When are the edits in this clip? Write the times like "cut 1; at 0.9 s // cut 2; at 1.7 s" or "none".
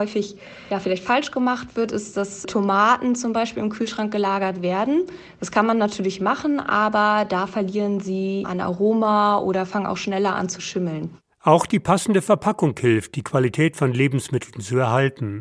cut 1; at 8.4 s